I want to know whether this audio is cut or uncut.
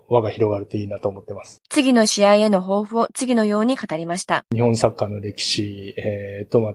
cut